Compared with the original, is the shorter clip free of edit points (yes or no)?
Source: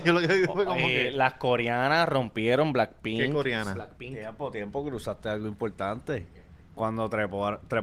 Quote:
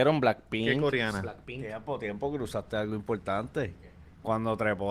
yes